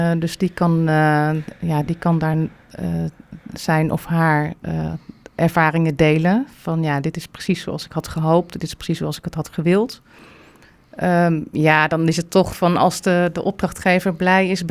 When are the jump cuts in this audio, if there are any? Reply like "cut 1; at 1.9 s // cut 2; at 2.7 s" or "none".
none